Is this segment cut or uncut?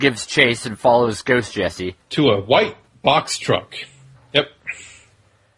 cut